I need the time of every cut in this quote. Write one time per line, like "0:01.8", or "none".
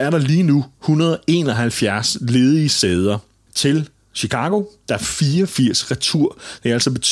0:03.5